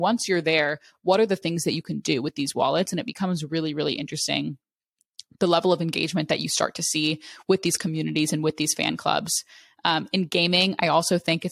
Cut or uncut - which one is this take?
uncut